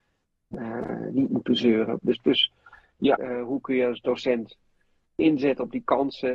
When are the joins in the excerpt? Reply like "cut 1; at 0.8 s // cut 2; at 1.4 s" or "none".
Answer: cut 1; at 2.0 s // cut 2; at 3.2 s